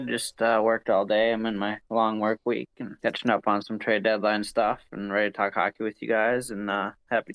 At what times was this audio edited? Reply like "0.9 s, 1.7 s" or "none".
3.0 s